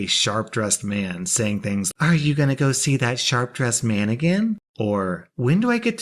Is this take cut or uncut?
cut